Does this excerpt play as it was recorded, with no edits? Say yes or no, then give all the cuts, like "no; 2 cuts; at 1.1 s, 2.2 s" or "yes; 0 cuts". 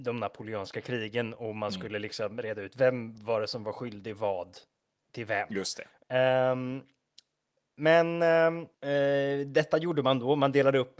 no; 2 cuts; at 6.0 s, 8.7 s